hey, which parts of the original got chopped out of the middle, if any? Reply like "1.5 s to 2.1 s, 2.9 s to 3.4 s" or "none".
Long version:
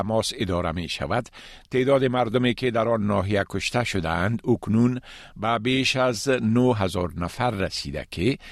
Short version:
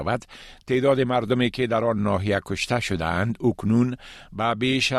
none